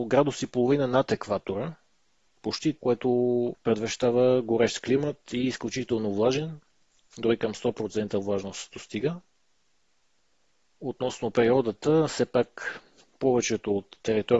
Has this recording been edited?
yes; 1 cut; at 2.8 s

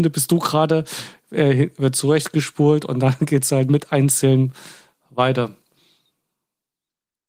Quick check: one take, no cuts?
yes; 0 cuts

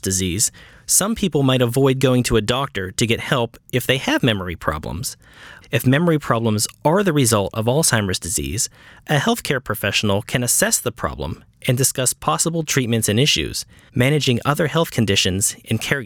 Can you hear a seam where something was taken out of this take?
yes; 2 cuts; at 5.6 s, 13.9 s

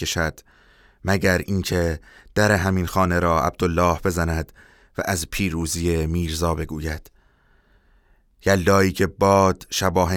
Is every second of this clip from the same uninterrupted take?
yes; 0 cuts

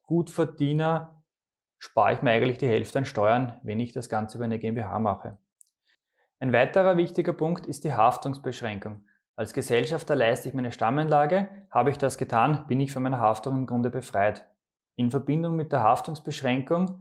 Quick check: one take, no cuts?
yes; 0 cuts

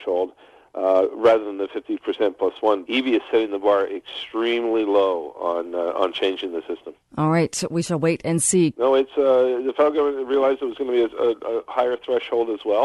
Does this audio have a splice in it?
yes; 3 cuts; at 2.8 s, 7.1 s, 8.7 s

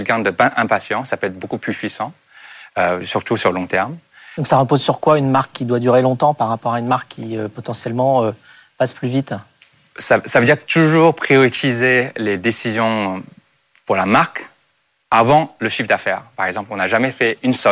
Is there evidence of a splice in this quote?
no; 0 cuts

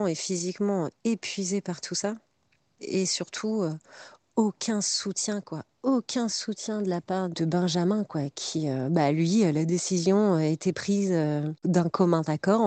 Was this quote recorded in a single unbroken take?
yes; 0 cuts

